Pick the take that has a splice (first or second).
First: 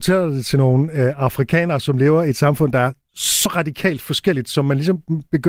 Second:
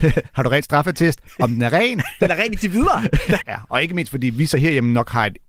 second